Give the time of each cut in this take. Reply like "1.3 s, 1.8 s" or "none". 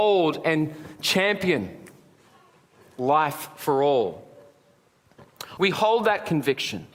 5.6 s

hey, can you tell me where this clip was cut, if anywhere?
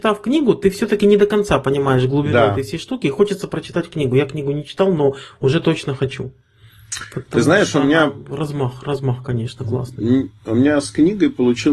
none

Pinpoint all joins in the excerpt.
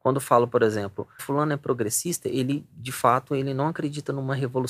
1.2 s

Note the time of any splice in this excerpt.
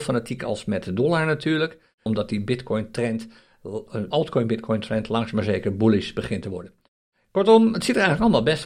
2.1 s, 4.1 s

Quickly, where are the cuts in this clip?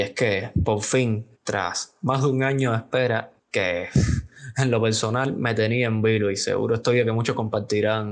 1.3 s, 3.4 s

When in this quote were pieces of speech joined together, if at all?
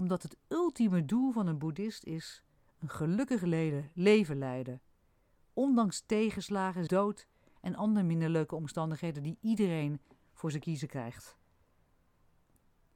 6.9 s

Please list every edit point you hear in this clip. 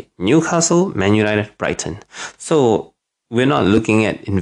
none

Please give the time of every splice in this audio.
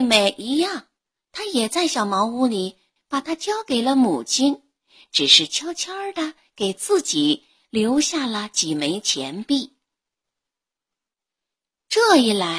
3.0 s

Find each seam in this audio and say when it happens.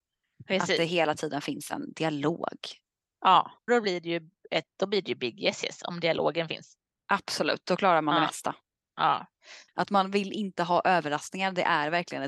3.7 s, 9.7 s

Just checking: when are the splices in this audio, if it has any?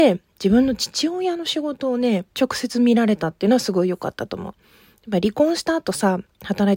2.3 s

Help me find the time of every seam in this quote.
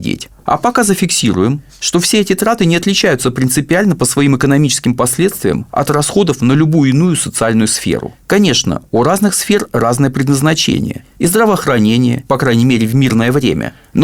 12.3 s

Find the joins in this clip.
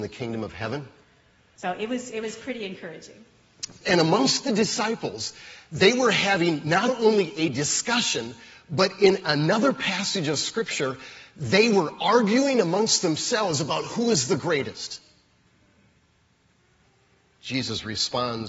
1.6 s, 3.8 s

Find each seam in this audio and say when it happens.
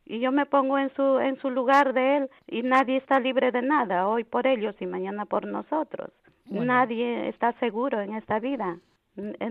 none

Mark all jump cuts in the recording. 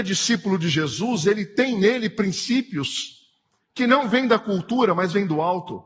none

